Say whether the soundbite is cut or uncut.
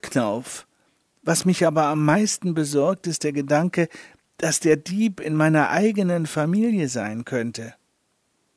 uncut